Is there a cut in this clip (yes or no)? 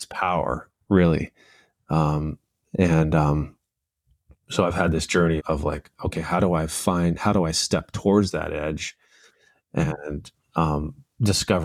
yes